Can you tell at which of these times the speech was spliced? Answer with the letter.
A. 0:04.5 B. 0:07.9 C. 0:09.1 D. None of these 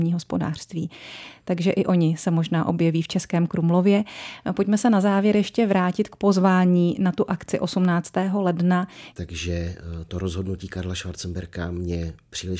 C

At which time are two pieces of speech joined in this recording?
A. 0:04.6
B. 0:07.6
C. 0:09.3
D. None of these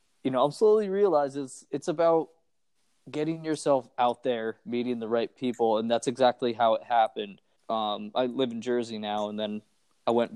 B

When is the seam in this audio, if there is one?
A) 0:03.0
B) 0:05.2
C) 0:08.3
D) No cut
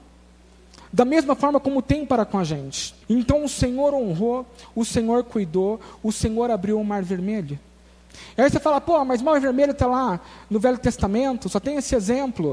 A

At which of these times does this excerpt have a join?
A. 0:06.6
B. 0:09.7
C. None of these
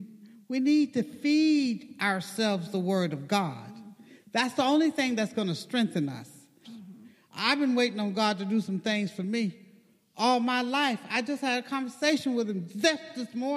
A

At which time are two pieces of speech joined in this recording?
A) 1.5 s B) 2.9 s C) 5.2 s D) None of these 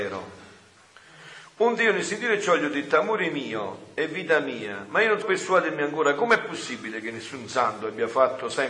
C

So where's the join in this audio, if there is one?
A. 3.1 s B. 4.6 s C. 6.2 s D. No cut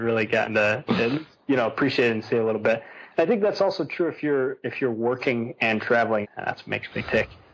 C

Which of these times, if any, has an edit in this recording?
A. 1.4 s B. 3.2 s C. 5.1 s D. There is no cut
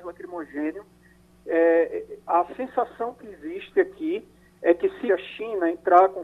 C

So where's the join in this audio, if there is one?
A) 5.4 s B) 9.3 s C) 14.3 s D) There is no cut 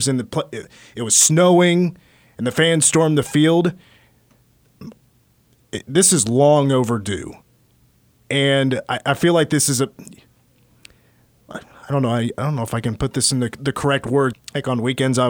C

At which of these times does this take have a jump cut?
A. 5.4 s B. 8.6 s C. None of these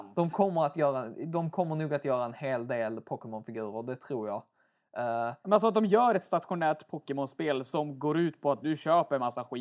B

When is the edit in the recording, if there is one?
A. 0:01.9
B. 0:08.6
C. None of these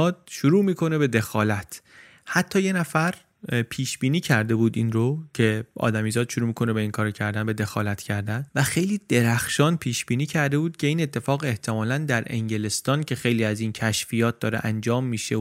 C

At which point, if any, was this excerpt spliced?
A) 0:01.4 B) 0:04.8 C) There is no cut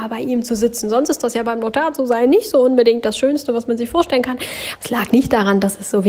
B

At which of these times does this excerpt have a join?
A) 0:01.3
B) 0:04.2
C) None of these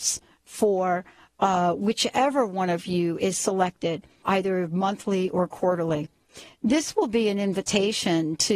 B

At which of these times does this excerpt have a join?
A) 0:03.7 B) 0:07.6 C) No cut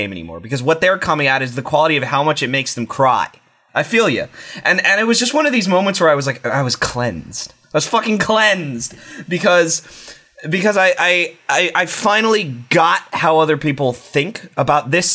A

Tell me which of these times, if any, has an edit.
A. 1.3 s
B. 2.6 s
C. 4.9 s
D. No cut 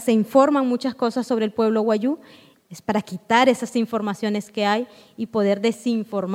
B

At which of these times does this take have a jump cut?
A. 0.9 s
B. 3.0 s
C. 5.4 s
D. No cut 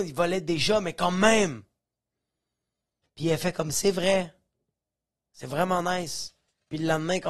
B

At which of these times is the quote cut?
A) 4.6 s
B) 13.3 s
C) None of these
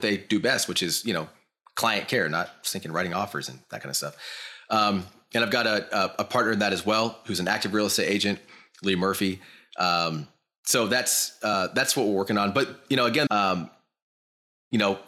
B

